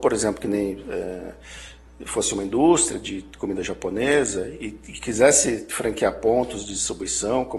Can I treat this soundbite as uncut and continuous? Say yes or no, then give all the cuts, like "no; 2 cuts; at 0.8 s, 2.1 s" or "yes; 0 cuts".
yes; 0 cuts